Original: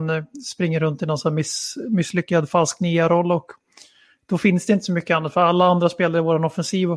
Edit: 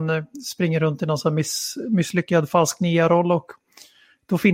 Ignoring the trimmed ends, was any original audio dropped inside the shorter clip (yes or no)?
no